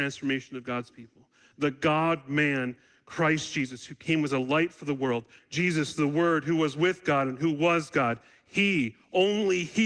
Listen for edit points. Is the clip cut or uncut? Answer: cut